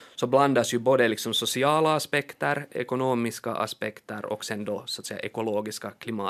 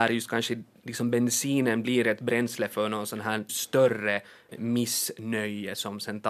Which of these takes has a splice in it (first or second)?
second